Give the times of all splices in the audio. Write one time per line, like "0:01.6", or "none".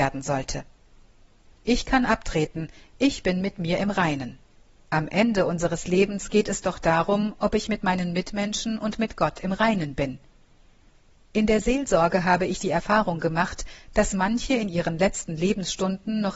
0:04.8